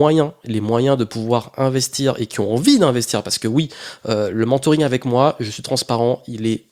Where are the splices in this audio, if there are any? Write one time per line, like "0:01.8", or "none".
none